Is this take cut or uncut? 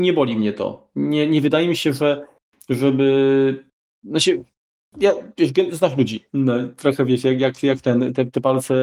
cut